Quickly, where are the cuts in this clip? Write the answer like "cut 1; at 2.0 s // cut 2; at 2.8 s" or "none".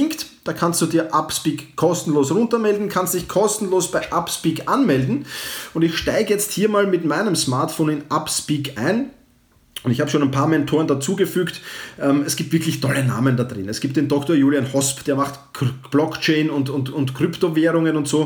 none

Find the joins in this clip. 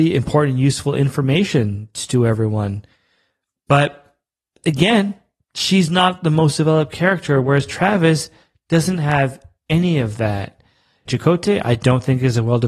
cut 1; at 11.1 s

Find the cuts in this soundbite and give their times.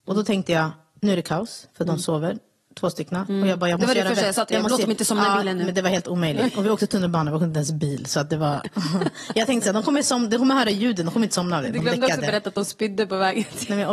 cut 1; at 3.3 s

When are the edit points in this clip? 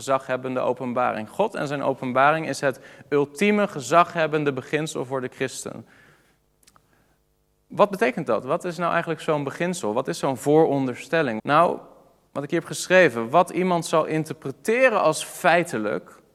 cut 1; at 11.4 s

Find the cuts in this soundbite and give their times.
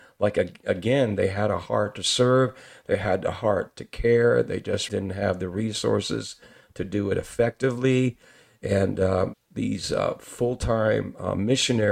cut 1; at 4.9 s // cut 2; at 9.3 s

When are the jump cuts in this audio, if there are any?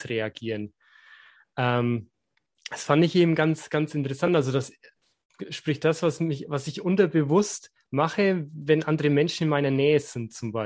none

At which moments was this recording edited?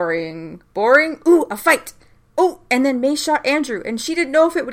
none

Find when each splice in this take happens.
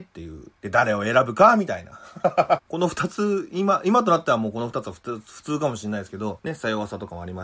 cut 1; at 2.6 s

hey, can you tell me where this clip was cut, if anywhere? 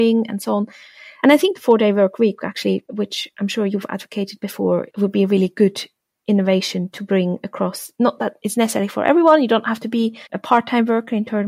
cut 1; at 10.3 s

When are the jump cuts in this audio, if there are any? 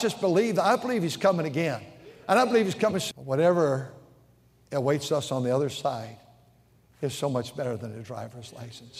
cut 1; at 3.1 s

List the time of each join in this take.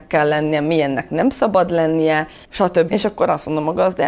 cut 1; at 2.9 s

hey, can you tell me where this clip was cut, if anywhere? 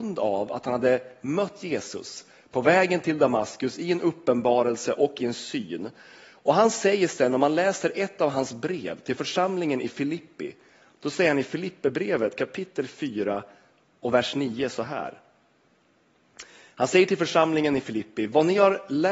none

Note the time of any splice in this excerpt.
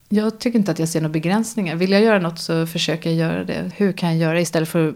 cut 1; at 3.7 s

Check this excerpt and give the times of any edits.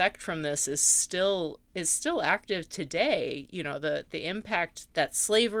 none

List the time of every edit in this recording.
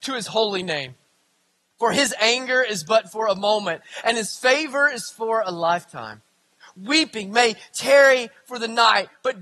none

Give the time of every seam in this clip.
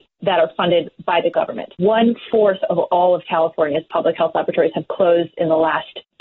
cut 1; at 1.7 s

